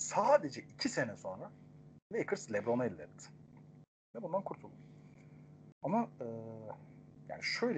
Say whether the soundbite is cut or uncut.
cut